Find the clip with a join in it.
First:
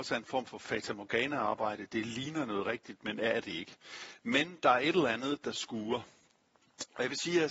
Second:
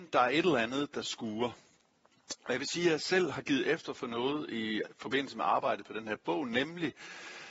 first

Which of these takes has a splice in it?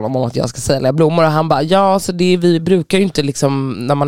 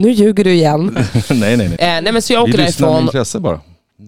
second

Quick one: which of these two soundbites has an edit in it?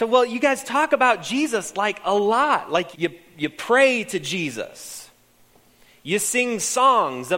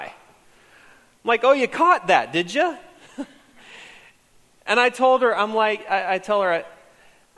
first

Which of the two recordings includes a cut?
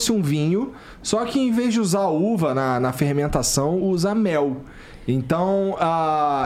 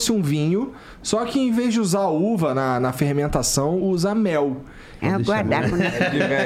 second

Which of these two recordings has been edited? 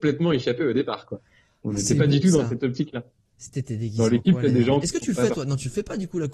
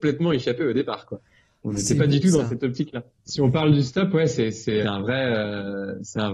second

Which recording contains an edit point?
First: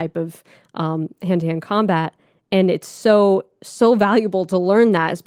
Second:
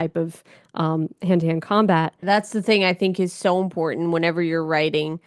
second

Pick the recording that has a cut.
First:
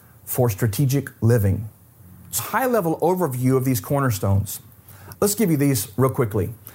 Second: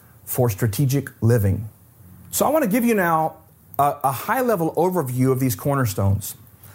first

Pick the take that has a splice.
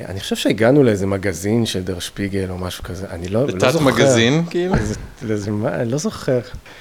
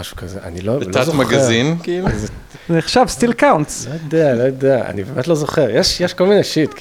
second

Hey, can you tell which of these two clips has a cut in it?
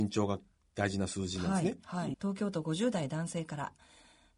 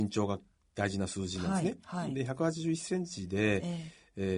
first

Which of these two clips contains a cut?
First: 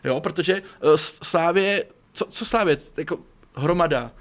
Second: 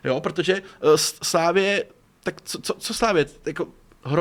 first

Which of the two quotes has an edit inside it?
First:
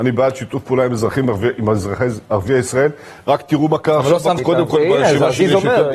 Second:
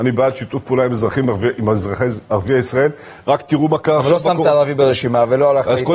first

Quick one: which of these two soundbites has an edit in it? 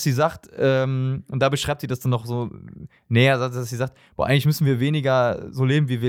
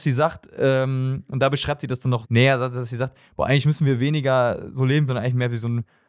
second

